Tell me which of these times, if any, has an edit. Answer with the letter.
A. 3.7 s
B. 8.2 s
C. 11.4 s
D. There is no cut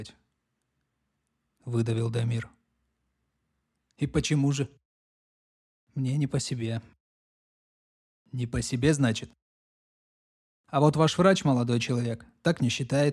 A